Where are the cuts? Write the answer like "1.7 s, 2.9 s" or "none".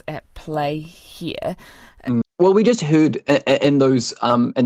2.2 s

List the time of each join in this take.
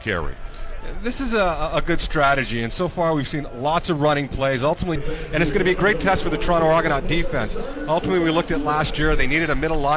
5.0 s

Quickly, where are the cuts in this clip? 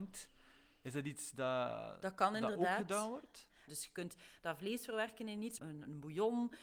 3.7 s, 5.6 s

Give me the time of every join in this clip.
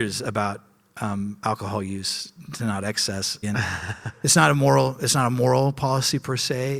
3.4 s

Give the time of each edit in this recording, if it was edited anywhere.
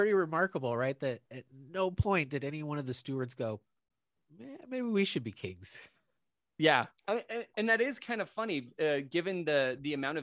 7.0 s

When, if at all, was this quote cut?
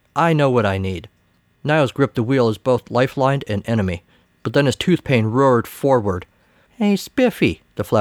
1.6 s, 4.2 s, 6.7 s

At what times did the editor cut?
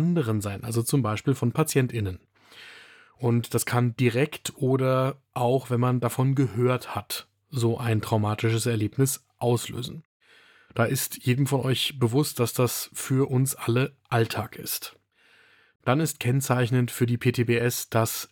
none

